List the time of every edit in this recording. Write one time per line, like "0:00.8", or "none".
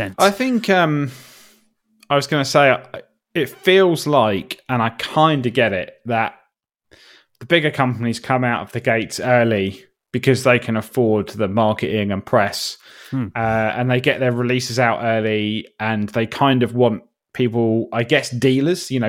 none